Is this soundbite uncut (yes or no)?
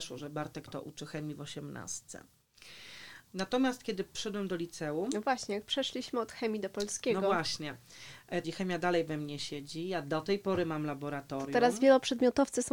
no